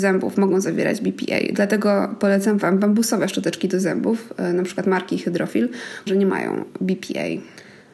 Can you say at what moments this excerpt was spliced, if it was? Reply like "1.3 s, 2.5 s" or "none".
6.1 s